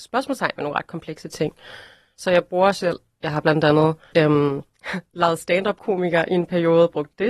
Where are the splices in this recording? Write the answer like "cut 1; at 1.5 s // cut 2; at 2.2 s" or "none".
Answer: cut 1; at 4.1 s